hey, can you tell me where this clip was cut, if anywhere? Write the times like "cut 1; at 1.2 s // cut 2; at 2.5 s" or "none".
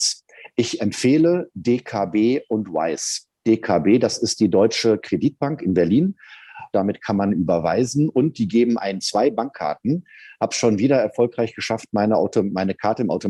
cut 1; at 6.7 s